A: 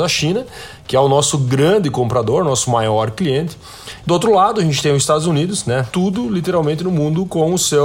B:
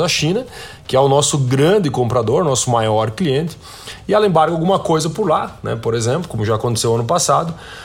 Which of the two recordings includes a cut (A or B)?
A